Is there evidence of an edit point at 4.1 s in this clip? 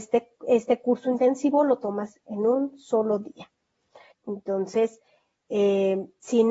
yes; 1 cut; at 4.1 s

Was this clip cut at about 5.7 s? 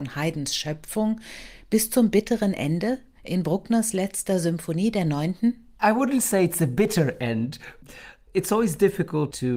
no; 0 cuts

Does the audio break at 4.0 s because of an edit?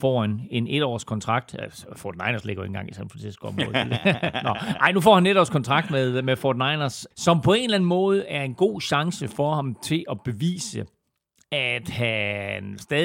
no; 1 cut; at 7.1 s

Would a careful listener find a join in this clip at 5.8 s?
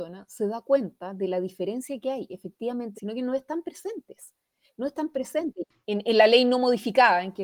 yes; 2 cuts; at 2.9 s, 5.8 s

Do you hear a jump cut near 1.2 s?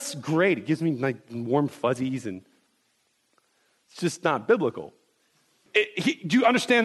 no; 1 cut; at 5.7 s

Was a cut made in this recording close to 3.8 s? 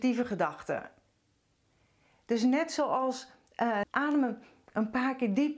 yes; 1 cut; at 3.8 s

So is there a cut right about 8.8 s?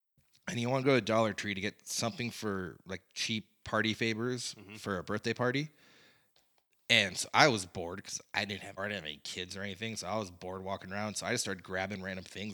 yes; 1 cut; at 8.8 s

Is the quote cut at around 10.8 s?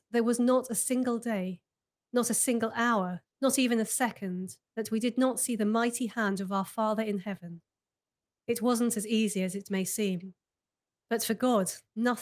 no; 2 cuts; at 3.2 s, 4.7 s

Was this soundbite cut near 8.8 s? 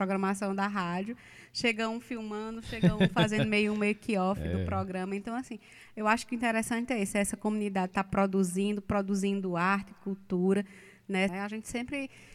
no; 1 cut; at 11.3 s

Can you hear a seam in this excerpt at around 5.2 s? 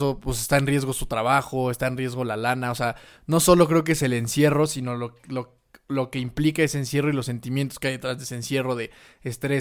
no; 0 cuts

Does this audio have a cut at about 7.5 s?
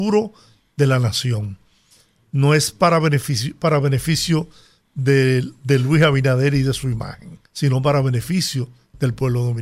yes; 1 cut; at 7.5 s

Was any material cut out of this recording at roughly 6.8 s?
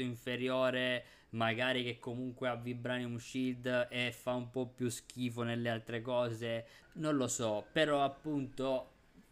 yes; 1 cut; at 6.8 s

